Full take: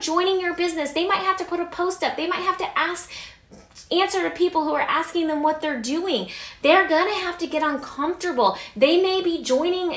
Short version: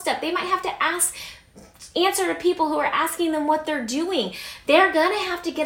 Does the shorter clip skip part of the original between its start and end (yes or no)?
no